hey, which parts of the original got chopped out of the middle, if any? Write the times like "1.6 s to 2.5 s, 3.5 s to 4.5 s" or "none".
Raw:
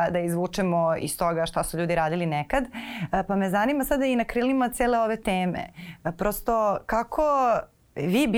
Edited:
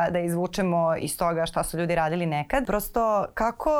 2.6 s to 6.2 s